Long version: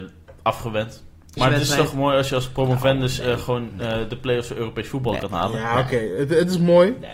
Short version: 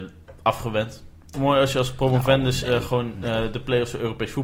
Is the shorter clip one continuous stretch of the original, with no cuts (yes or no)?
no